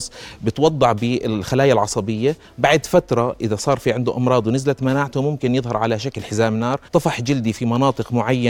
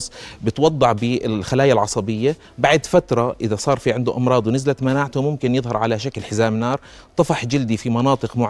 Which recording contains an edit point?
first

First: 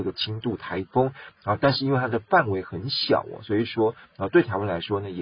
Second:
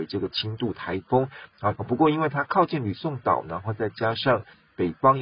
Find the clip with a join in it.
second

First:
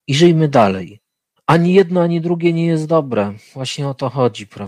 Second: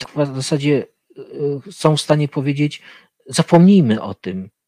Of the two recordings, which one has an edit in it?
first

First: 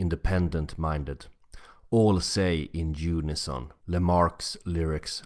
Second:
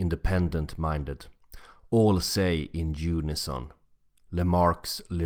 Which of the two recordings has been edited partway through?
first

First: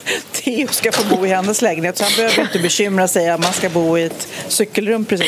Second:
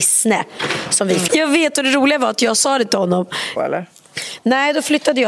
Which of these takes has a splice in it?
second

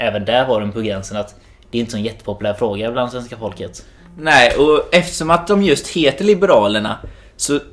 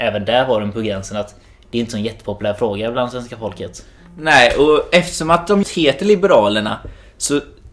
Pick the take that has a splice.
second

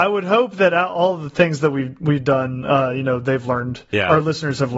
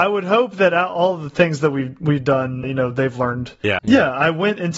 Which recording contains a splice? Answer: second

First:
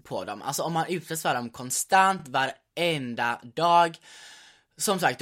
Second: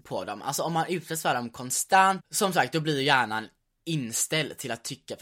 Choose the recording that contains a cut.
second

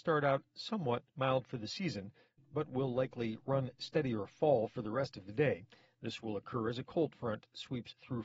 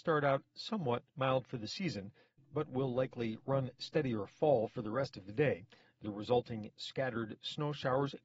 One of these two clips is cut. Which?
second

